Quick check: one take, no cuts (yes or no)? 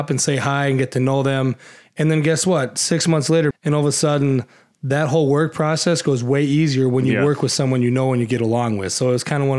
no